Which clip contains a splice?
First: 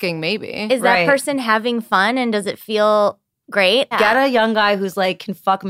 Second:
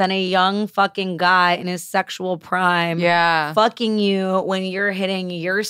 first; 1 cut; at 3.9 s

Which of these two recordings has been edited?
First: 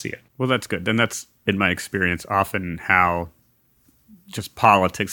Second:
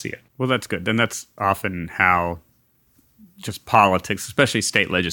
second; 1 cut; at 1.4 s

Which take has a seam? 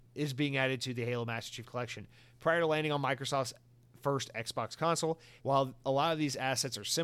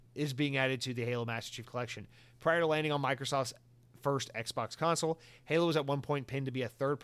first; 1 cut; at 5.4 s

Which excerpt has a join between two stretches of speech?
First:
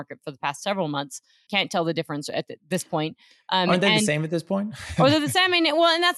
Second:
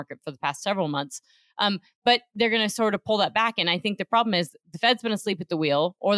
first; 1 cut; at 1.5 s

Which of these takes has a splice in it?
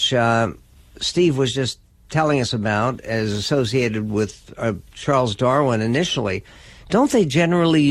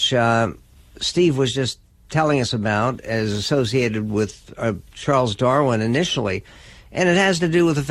first; 1 cut; at 6.8 s

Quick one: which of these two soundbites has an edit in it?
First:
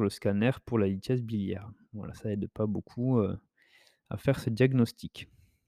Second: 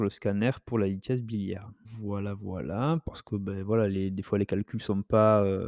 second; 1 cut; at 1.8 s

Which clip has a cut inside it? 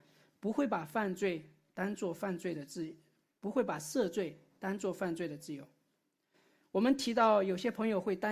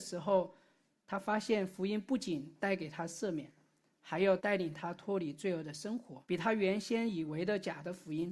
second; 2 cuts; at 4.4 s, 6.2 s

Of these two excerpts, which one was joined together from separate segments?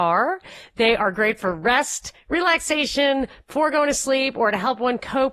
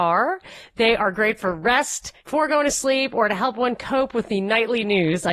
second; 1 cut; at 2.2 s

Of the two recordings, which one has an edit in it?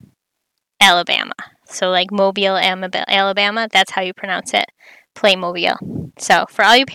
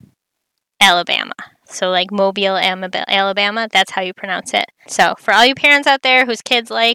second; 1 cut; at 4.8 s

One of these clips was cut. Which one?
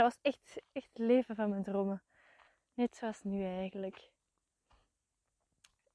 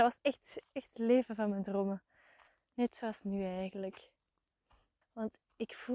second; 1 cut; at 5.0 s

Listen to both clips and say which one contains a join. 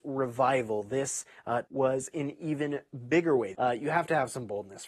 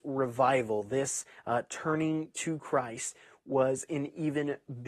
first; 2 cuts; at 1.7 s, 3.5 s

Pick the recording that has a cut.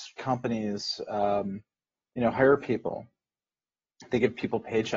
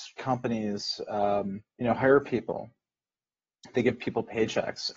second; 1 cut; at 1.7 s

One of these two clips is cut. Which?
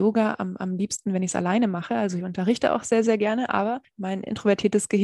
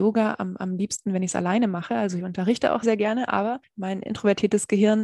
second; 1 cut; at 2.8 s

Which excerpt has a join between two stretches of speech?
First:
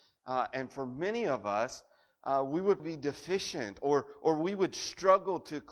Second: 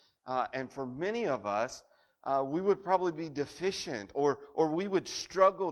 first; 1 cut; at 2.8 s

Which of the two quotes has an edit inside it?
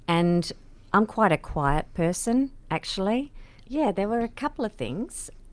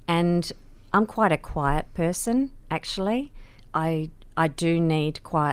first; 1 cut; at 3.7 s

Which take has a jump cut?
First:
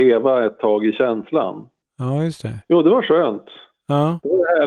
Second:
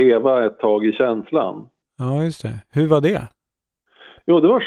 first; 1 cut; at 2.6 s

